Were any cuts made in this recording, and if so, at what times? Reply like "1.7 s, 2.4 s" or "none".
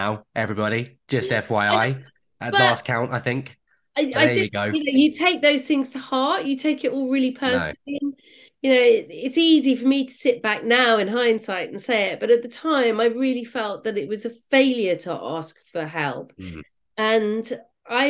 none